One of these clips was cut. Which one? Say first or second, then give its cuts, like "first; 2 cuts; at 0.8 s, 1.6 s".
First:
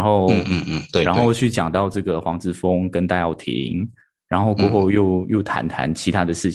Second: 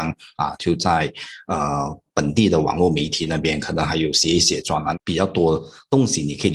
second; 1 cut; at 4.9 s